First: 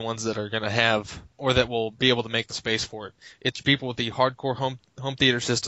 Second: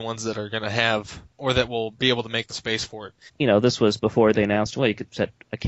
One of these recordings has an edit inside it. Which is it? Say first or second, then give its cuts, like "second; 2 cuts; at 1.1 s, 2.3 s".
second; 1 cut; at 3.3 s